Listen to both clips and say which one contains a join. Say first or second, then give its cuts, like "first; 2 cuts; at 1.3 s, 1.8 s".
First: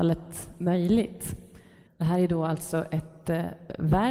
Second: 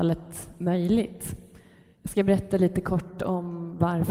first; 1 cut; at 1.9 s